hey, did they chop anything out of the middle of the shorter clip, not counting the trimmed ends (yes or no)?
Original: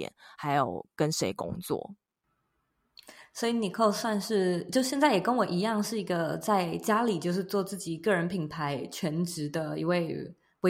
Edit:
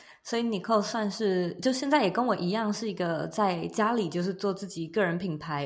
no